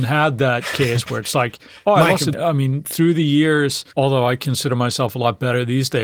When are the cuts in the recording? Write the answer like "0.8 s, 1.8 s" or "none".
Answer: 2.3 s, 3.9 s